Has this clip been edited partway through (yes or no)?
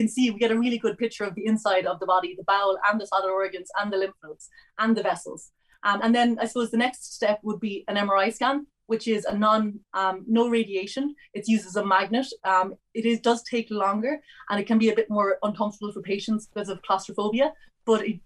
yes